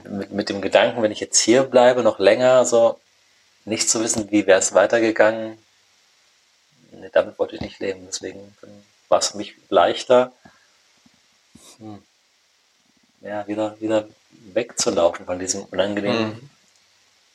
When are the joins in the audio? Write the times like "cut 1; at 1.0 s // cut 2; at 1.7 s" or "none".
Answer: none